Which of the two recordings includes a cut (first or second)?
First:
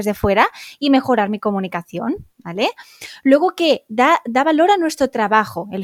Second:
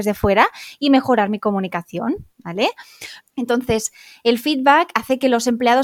second